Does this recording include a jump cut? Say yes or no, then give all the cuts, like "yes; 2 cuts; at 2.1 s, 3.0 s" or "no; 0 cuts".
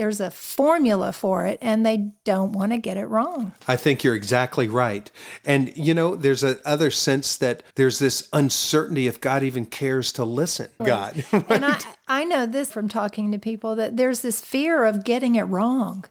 yes; 3 cuts; at 7.7 s, 10.8 s, 12.7 s